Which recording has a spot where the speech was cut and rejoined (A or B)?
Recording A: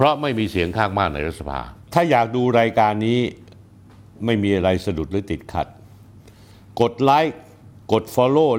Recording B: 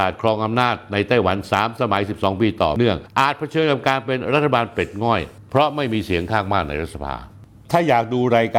A